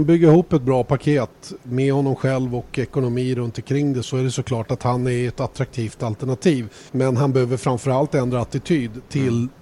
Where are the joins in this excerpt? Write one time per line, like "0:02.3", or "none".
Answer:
0:04.0
0:06.9